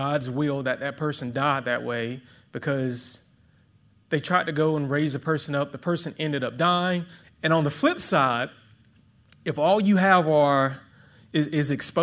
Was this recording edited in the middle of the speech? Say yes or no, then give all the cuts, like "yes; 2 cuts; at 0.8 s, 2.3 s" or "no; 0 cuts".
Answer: yes; 1 cut; at 7.2 s